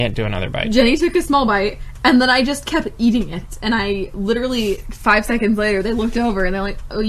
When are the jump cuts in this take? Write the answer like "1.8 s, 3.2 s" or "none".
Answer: none